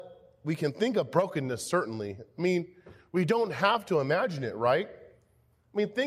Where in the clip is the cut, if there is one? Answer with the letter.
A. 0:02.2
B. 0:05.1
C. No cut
C